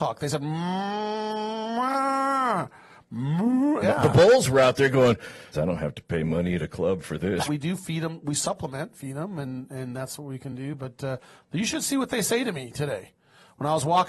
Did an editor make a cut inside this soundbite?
yes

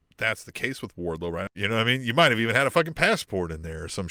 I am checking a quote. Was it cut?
yes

